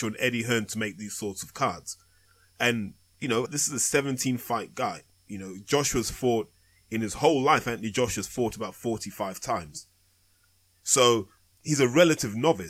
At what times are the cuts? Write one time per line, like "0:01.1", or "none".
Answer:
0:03.5